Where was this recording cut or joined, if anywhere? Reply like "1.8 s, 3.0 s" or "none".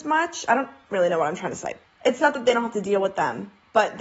1.8 s